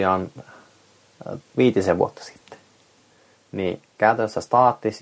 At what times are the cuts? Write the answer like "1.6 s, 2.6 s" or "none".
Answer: 1.4 s